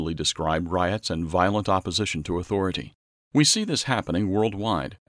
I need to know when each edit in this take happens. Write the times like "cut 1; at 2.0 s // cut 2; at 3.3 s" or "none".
cut 1; at 3.1 s